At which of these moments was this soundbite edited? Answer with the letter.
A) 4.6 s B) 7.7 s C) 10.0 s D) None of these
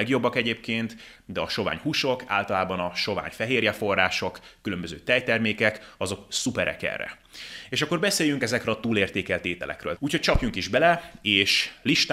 C